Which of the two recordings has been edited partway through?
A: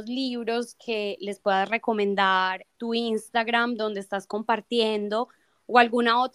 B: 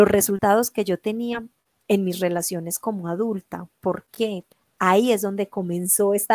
A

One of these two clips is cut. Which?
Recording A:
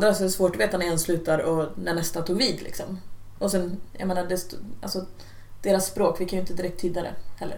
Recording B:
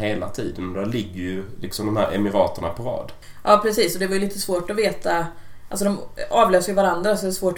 A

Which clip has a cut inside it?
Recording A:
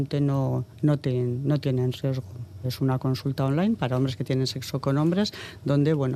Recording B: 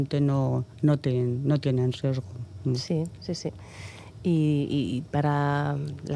A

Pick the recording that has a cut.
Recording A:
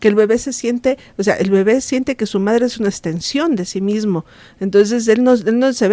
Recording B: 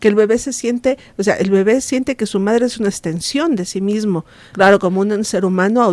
B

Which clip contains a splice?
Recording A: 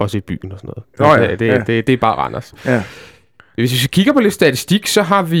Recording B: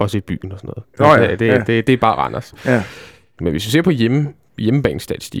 B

